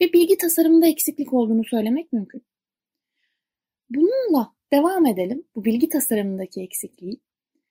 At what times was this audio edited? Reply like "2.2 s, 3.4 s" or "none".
none